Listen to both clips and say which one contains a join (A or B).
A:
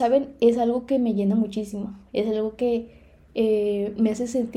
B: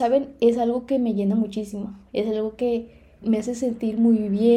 B